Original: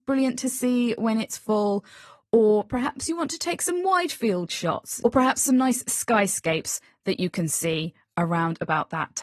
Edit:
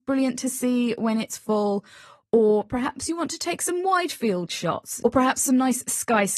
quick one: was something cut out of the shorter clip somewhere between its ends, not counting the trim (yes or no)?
no